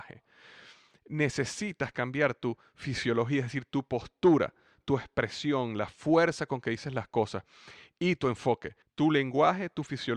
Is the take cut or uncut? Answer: cut